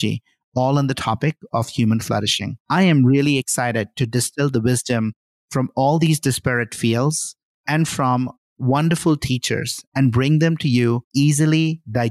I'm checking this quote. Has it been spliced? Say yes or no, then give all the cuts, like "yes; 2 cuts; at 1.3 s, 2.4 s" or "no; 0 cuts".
yes; 1 cut; at 2.6 s